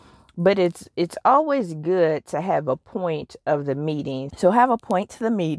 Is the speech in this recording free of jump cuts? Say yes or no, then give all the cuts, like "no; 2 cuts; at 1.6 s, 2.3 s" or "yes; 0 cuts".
no; 1 cut; at 4.3 s